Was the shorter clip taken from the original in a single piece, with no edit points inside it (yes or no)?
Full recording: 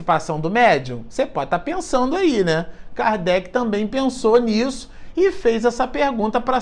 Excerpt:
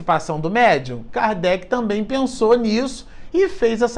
no